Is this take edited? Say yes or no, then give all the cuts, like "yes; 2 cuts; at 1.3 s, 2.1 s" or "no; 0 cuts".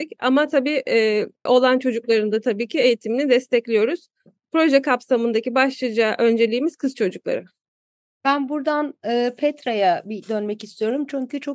yes; 1 cut; at 1.5 s